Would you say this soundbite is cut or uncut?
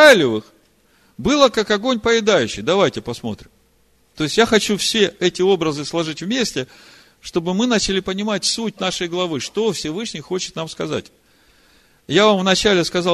uncut